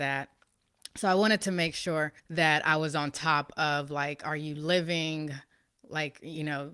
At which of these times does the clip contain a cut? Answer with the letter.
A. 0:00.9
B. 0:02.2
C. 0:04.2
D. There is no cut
B